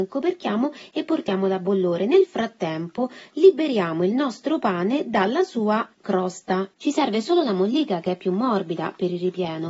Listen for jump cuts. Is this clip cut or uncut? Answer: cut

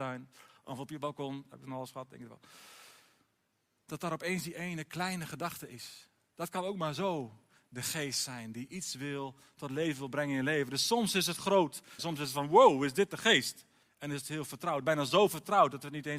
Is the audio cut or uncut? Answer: cut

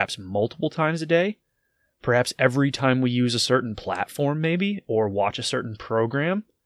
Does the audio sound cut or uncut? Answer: uncut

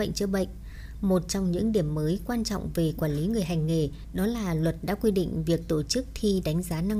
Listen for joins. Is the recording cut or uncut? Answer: uncut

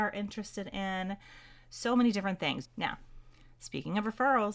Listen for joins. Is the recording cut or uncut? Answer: cut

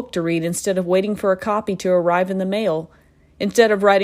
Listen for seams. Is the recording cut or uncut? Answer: uncut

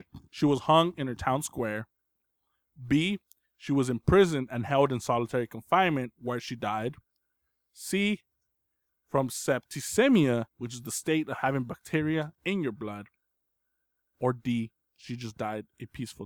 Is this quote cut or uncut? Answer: cut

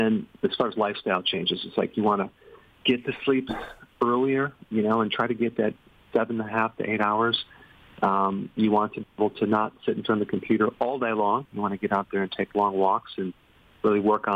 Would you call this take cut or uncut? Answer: uncut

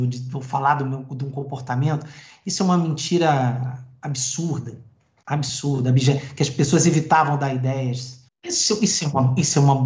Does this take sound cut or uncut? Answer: cut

